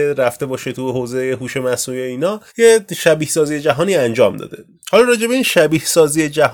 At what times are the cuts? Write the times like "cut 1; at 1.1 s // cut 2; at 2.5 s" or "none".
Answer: cut 1; at 2.5 s